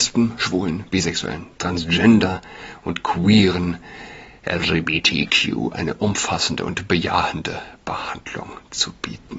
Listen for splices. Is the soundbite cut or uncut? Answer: uncut